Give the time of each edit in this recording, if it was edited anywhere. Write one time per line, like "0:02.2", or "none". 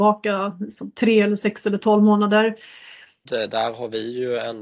0:03.2